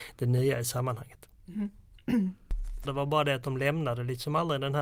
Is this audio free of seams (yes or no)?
no